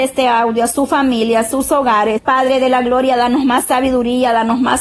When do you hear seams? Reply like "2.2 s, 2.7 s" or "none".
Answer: 2.2 s